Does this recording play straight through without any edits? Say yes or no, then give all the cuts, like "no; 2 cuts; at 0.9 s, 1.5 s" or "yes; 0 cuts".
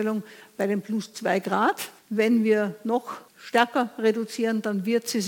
no; 2 cuts; at 2.0 s, 3.3 s